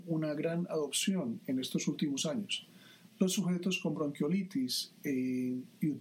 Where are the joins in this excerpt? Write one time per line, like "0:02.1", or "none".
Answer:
0:03.1